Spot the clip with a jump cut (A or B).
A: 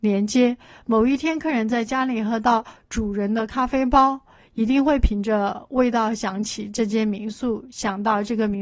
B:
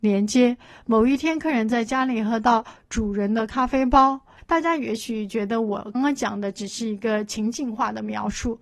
B